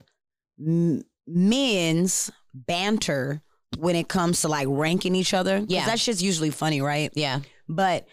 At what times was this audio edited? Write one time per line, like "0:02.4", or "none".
none